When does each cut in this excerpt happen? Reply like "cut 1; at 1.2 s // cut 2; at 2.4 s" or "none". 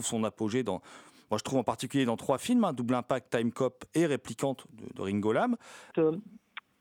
cut 1; at 5.9 s